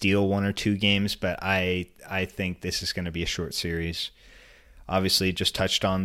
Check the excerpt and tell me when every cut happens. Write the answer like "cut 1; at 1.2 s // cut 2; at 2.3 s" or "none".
none